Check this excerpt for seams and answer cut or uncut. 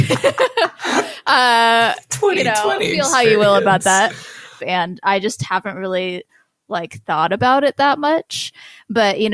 cut